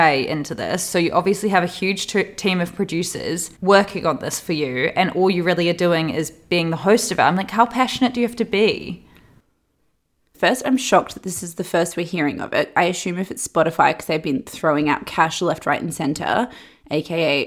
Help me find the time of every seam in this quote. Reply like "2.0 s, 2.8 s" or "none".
3.6 s, 10.3 s

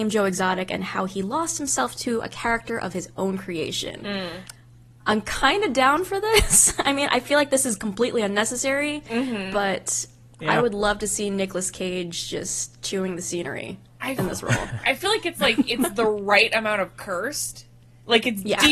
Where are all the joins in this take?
none

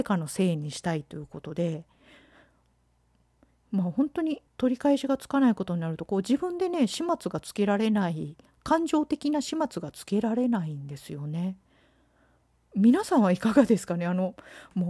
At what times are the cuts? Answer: 4.5 s

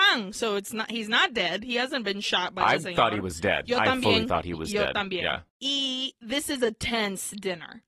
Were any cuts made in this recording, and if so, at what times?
none

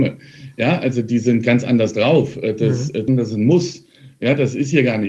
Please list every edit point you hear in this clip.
3.1 s

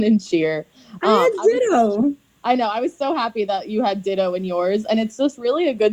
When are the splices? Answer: none

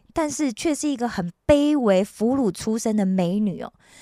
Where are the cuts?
none

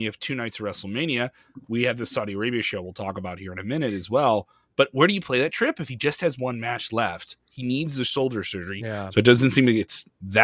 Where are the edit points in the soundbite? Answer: 8.8 s

